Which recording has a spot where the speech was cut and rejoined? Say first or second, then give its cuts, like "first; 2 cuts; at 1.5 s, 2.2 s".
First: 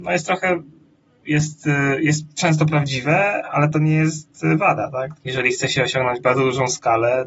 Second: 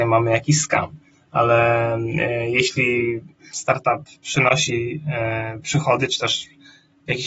first; 1 cut; at 5.1 s